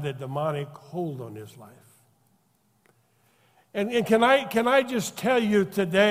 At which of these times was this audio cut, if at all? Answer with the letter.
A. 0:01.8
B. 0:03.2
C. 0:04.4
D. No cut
D